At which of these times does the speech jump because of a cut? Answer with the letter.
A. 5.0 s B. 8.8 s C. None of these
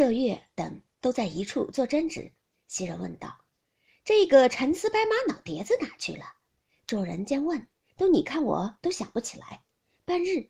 B